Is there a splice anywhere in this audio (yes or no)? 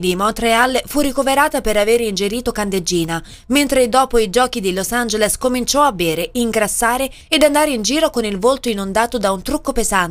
no